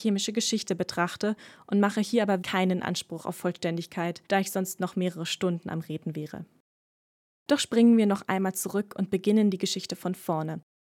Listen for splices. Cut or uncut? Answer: cut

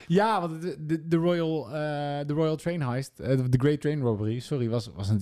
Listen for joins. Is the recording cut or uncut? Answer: uncut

